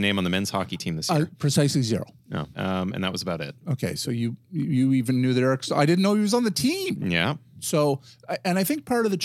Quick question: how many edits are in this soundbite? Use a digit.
1